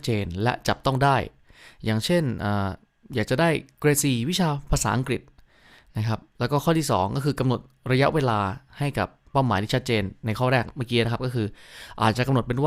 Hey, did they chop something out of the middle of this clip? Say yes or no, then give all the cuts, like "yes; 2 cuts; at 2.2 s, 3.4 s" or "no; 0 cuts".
no; 0 cuts